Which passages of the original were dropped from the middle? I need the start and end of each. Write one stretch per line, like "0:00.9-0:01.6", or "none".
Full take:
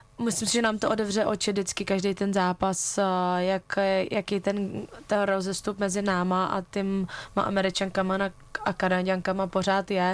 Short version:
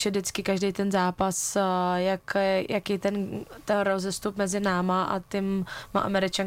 none